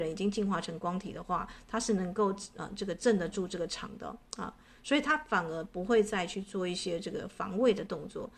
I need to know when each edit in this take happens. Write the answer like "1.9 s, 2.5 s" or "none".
none